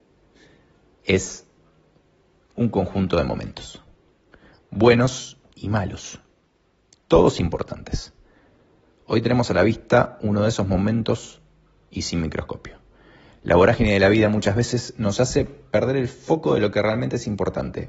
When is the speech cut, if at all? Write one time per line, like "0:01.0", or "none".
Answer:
none